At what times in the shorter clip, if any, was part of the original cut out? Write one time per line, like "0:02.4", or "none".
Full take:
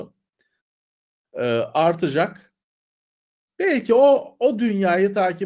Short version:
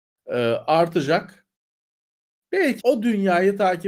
0:02.8